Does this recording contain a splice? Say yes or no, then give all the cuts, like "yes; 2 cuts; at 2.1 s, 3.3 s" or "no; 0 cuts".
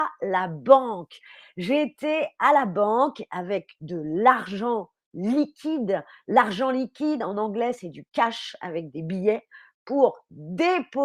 no; 0 cuts